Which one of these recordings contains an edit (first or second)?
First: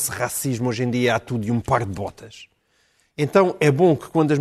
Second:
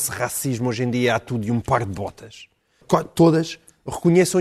second